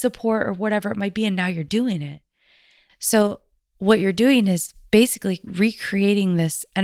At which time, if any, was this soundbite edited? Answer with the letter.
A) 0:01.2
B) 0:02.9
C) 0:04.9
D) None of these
B